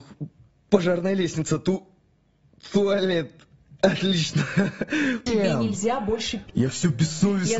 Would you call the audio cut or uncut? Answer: cut